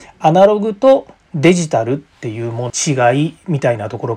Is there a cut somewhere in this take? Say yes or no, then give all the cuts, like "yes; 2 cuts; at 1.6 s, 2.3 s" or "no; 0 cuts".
yes; 1 cut; at 2.7 s